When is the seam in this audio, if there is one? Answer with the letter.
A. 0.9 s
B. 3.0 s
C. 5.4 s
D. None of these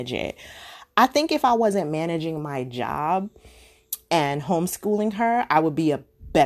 D